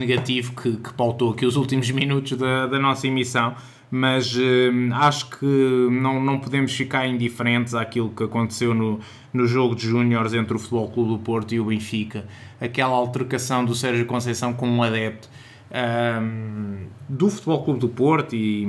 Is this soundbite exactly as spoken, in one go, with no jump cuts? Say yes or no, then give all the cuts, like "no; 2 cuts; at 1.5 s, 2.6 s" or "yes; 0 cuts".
yes; 0 cuts